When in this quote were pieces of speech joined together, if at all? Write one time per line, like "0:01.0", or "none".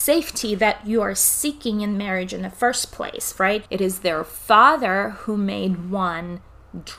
0:03.7